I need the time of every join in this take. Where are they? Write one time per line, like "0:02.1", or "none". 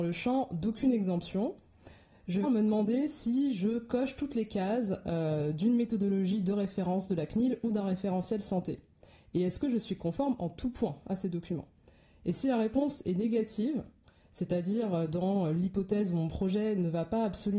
0:02.4